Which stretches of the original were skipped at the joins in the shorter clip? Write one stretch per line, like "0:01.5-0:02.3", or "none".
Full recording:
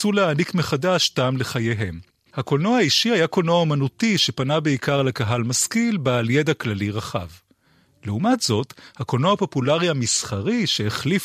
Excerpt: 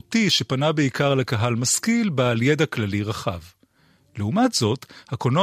none